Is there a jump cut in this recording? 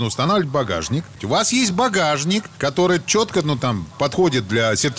yes; 1 cut; at 1.2 s

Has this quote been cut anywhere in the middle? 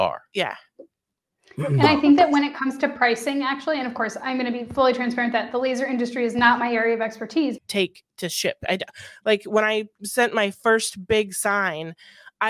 yes; 1 cut; at 7.6 s

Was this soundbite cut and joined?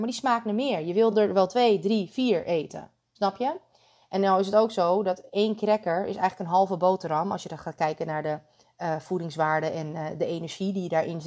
no; 0 cuts

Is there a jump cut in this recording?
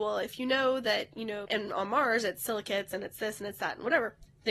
yes; 1 cut; at 1.4 s

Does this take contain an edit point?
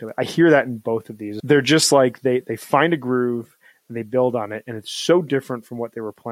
yes; 1 cut; at 1.4 s

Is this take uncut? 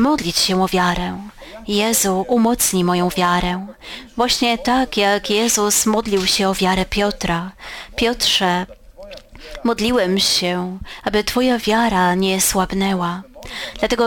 yes; 0 cuts

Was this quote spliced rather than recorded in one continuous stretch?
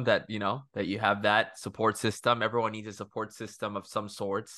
no; 0 cuts

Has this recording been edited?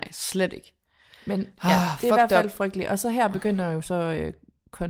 no; 0 cuts

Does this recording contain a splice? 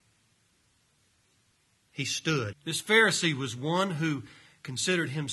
yes; 1 cut; at 2.5 s

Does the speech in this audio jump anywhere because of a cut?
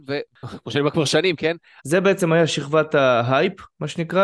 yes; 1 cut; at 1.8 s

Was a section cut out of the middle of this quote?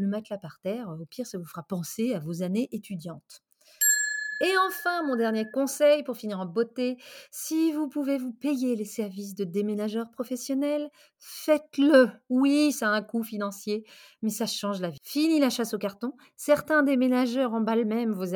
no; 0 cuts

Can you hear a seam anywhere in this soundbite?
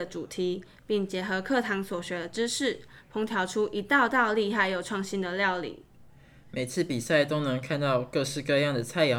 no; 0 cuts

